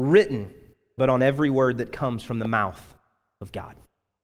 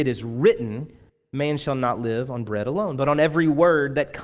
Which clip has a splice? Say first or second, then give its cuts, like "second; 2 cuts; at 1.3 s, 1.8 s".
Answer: first; 1 cut; at 1.0 s